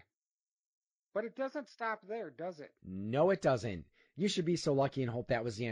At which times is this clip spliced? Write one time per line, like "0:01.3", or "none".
0:02.8